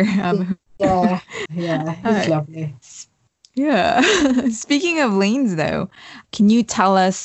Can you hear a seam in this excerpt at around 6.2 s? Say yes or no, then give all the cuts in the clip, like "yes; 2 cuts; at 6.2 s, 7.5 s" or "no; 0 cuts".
yes; 2 cuts; at 1.5 s, 6.2 s